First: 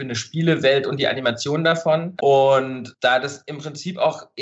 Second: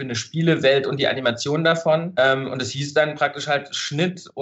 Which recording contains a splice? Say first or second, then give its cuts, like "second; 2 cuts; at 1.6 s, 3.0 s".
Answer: first; 1 cut; at 2.2 s